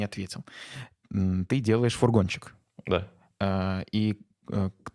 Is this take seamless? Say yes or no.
yes